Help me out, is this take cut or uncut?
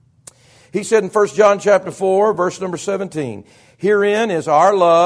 uncut